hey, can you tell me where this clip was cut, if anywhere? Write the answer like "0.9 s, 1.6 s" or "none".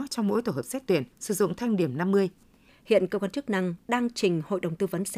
1.1 s, 2.7 s